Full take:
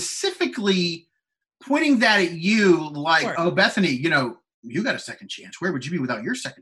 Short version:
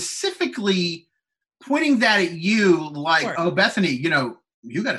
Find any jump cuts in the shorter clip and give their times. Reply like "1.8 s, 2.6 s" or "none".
none